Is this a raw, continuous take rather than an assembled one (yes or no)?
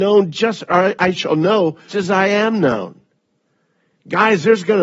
no